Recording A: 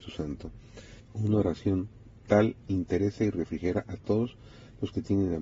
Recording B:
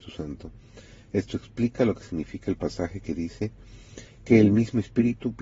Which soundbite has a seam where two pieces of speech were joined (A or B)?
A